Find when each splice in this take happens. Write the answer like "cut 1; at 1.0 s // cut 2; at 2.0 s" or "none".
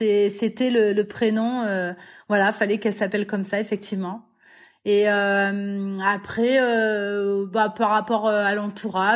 none